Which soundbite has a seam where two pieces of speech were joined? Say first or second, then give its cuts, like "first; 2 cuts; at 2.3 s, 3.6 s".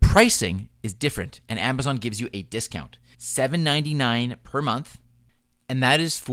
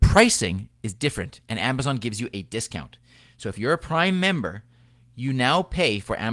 first; 1 cut; at 3.1 s